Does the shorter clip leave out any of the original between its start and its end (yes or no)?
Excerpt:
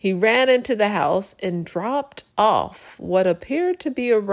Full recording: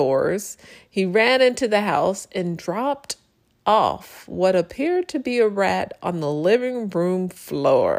yes